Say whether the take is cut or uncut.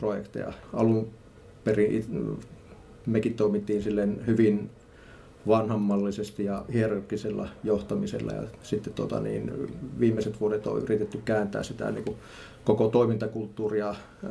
uncut